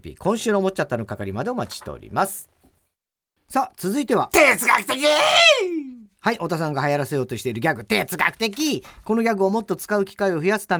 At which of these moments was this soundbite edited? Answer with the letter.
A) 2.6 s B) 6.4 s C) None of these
C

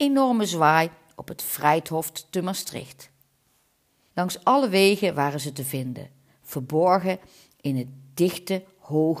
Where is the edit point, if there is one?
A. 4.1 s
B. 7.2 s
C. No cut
A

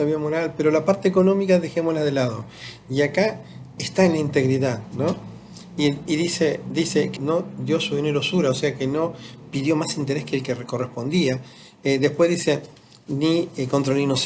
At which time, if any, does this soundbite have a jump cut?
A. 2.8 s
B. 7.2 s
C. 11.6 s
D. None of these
B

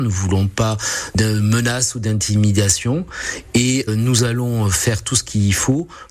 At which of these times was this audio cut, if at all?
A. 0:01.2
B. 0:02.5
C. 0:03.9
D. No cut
C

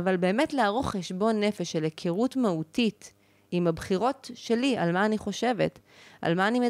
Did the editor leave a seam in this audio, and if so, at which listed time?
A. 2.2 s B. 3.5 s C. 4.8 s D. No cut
B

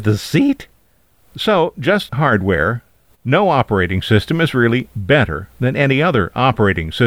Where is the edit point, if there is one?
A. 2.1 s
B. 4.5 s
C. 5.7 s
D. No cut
A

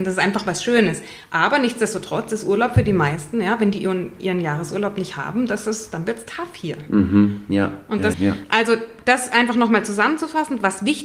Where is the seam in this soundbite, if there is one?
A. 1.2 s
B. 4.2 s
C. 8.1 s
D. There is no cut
C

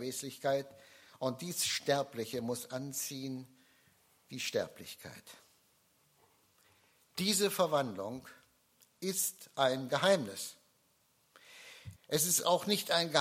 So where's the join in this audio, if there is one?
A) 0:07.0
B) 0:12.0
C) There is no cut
B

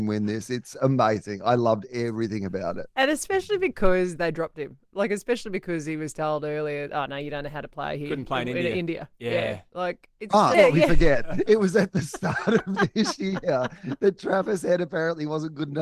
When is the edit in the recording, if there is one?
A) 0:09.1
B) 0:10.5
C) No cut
B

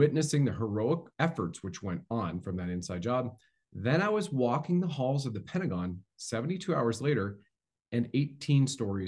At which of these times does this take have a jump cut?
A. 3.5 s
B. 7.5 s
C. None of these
C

